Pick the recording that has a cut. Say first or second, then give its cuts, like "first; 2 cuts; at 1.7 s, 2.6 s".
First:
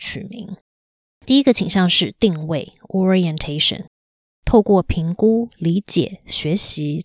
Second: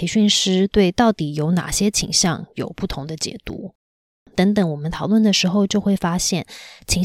first; 1 cut; at 1.1 s